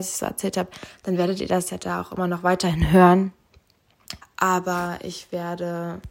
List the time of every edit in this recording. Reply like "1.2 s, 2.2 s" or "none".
4.2 s